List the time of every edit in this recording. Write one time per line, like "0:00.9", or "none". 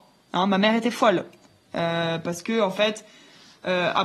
none